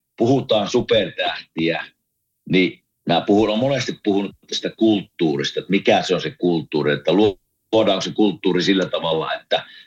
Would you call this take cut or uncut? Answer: uncut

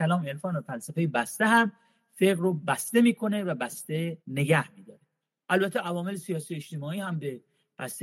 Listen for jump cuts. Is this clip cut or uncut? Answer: cut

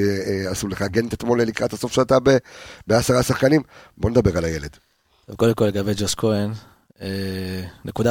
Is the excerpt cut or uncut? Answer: uncut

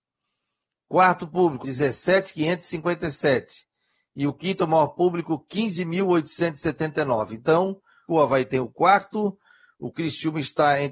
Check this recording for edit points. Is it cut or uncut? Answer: cut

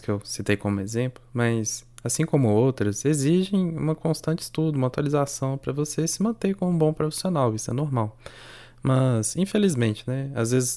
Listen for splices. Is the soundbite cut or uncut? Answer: uncut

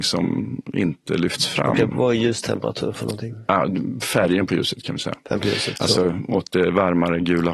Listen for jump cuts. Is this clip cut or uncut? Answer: uncut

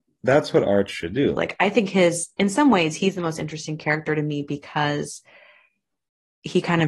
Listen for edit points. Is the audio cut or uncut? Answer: cut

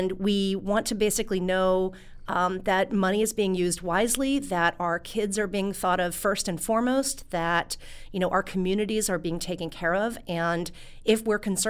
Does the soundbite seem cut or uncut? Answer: uncut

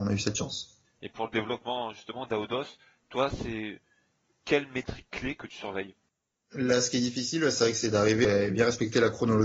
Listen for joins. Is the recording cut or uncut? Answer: uncut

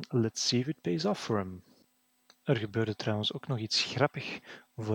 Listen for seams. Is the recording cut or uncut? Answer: uncut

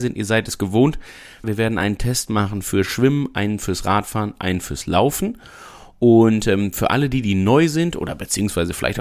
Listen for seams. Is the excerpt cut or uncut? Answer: cut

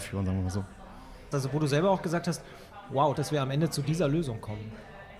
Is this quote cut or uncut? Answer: cut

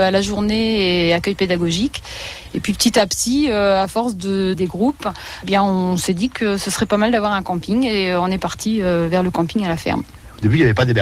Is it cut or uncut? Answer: cut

